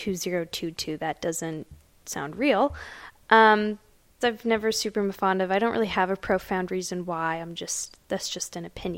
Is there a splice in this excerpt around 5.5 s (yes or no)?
no